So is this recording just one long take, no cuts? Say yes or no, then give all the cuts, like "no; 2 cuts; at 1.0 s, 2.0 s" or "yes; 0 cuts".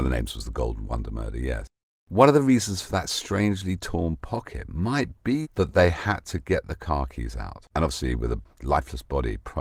no; 2 cuts; at 5.4 s, 7.7 s